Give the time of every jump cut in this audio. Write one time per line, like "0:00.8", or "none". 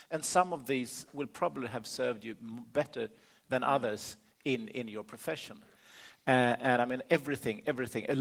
none